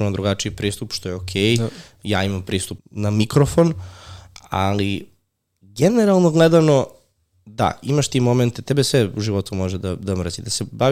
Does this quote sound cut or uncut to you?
cut